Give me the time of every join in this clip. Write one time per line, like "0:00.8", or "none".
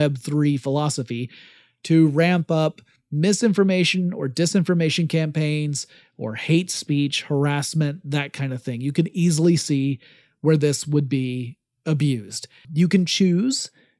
0:12.6

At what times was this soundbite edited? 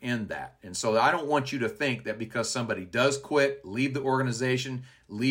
none

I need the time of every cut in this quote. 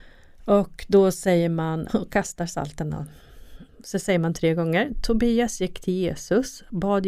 0:01.9

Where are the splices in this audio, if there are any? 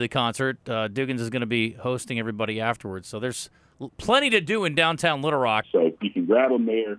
0:05.6

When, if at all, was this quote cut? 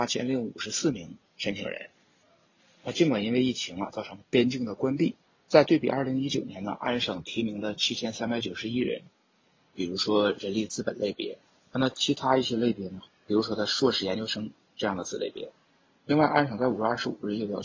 0:09.7
0:13.0

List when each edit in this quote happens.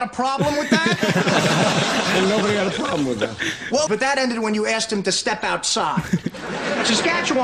0:03.9

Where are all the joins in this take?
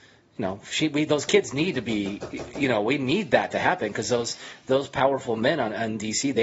none

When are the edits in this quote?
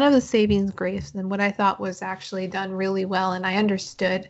none

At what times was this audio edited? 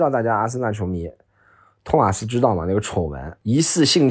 none

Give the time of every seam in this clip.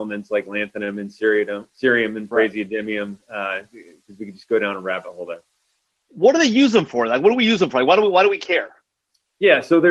none

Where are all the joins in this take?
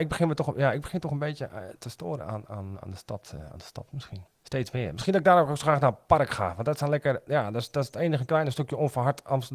0:02.7
0:04.3

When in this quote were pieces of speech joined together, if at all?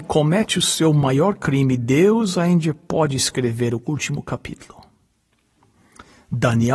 none

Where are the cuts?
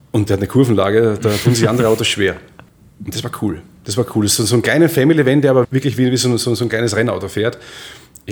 0:05.6

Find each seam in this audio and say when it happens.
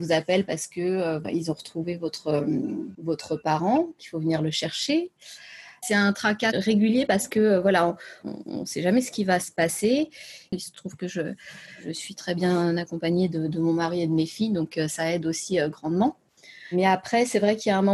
0:10.5
0:14.9

